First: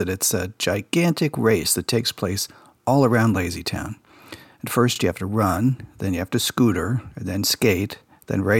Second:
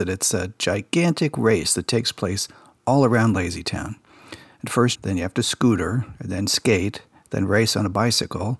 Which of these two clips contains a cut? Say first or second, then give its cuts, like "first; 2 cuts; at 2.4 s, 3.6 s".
second; 1 cut; at 5.0 s